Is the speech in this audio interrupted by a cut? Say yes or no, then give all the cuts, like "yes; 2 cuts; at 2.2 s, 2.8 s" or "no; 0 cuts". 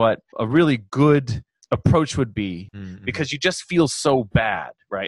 yes; 1 cut; at 2.7 s